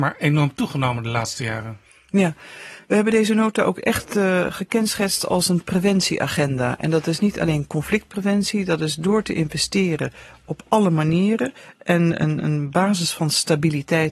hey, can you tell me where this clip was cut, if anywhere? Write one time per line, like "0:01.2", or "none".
none